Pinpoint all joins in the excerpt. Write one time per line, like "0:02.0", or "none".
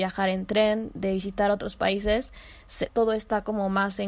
0:02.9